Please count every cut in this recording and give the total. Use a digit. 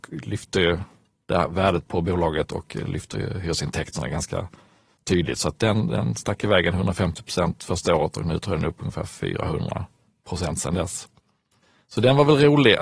1